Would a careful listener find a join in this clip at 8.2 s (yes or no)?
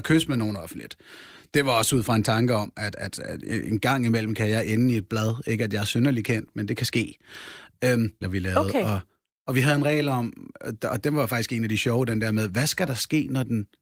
yes